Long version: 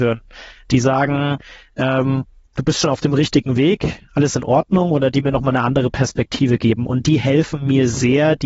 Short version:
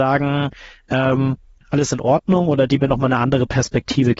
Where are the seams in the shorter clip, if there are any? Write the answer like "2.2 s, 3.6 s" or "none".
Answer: 1.6 s